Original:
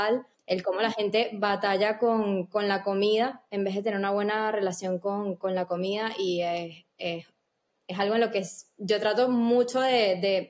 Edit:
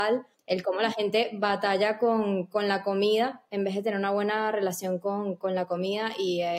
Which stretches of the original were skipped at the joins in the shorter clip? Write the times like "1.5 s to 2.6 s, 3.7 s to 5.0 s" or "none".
none

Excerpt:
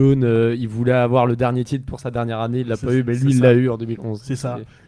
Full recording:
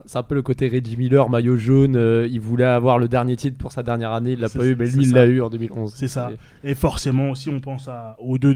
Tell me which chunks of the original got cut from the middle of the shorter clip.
none

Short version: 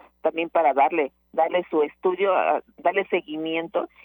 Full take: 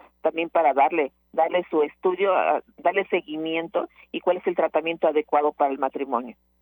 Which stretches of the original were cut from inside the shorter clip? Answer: none

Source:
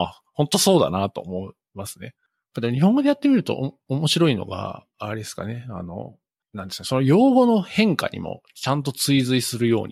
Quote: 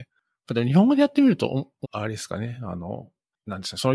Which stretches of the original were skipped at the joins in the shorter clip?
3.9 s to 4.9 s

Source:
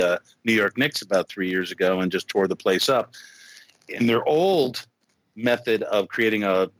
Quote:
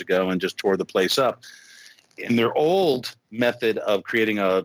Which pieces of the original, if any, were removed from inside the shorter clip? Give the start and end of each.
4.9 s to 5.3 s

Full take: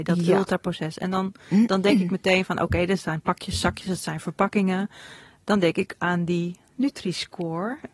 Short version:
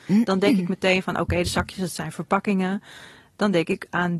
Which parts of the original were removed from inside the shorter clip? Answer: 2.9 s to 3.5 s

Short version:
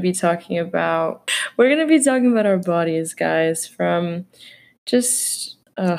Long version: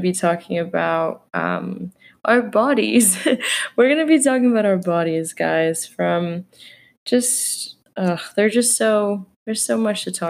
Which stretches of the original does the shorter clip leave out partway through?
1.3 s to 3.5 s

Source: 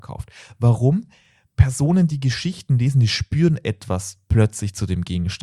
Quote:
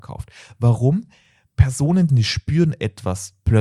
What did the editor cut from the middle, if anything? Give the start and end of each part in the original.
2.1 s to 2.9 s

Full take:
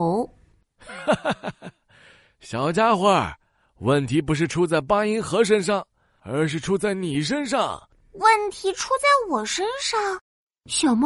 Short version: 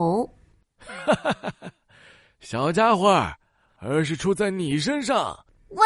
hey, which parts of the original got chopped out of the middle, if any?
3.7 s to 6.1 s

